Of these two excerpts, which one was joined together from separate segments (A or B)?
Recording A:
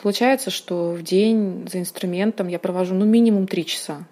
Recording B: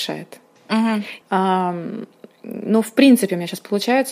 B